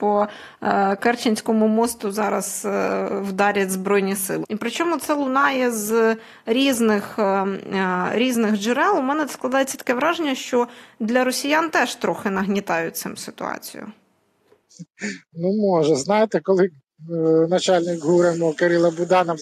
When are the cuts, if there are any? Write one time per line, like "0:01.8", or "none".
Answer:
0:04.4